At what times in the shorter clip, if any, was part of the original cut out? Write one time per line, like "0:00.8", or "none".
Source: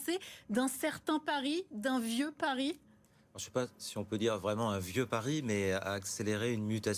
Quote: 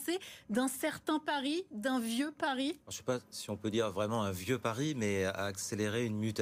0:02.8